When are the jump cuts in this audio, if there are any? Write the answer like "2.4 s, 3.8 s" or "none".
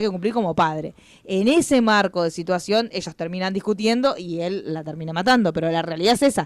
none